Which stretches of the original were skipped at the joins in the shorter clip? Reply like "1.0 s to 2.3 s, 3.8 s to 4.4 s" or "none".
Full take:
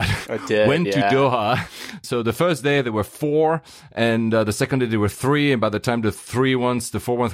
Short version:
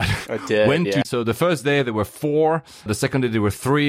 1.0 s to 2.0 s, 3.8 s to 4.4 s